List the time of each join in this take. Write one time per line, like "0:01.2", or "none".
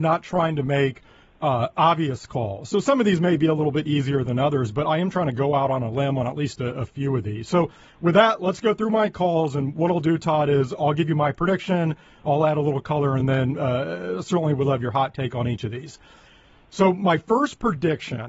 none